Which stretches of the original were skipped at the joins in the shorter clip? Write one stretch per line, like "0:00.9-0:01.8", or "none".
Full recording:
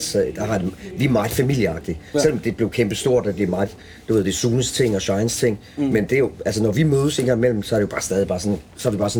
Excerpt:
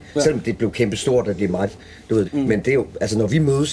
0:04.2-0:05.7